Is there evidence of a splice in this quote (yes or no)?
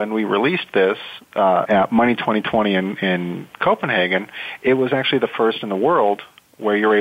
yes